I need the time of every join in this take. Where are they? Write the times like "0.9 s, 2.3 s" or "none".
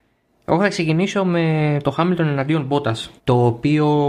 3.2 s